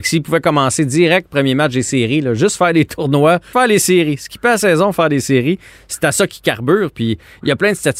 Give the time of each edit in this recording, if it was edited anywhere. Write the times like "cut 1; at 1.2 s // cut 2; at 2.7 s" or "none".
cut 1; at 3.5 s